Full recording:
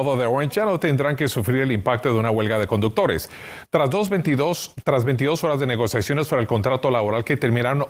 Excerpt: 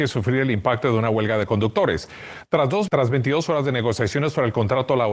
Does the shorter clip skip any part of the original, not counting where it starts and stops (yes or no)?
yes